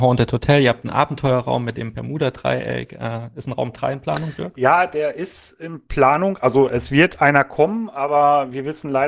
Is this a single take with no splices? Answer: yes; 0 cuts

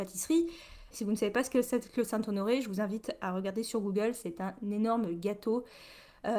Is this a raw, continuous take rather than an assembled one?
no; 1 cut; at 0.9 s

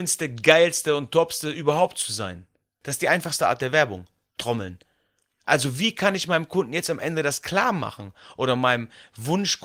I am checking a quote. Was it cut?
no; 0 cuts

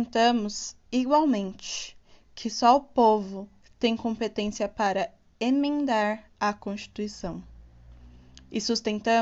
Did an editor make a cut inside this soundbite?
yes; 2 cuts; at 3.6 s, 6.3 s

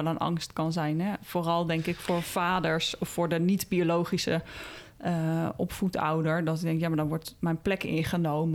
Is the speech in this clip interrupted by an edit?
no; 0 cuts

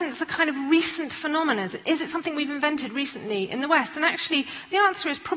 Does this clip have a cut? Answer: no; 0 cuts

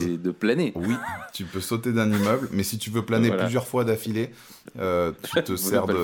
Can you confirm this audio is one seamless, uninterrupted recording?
yes; 0 cuts

